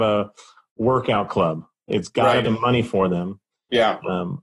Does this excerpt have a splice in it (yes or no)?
yes